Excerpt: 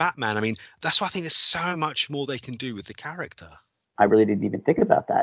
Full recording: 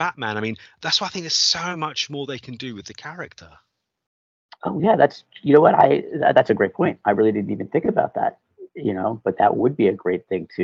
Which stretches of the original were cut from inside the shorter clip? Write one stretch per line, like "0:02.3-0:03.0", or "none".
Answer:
0:04.0-0:07.0